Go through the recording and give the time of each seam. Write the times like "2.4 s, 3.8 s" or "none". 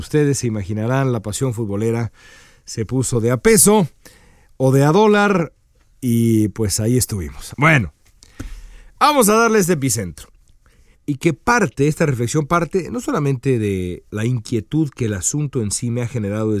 7.5 s, 10.9 s